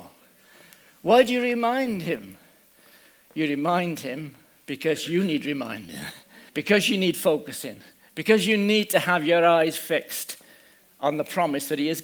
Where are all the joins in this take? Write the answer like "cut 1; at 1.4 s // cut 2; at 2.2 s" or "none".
cut 1; at 6.5 s